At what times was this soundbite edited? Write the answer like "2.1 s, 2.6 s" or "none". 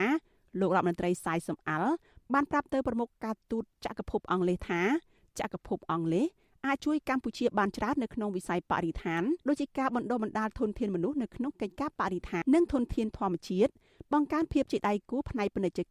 9.4 s, 12.4 s